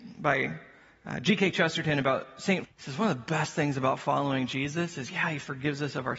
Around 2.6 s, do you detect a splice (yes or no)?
yes